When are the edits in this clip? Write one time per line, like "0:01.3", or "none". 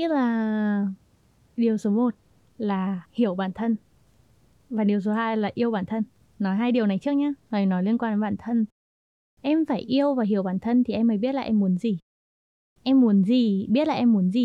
0:03.0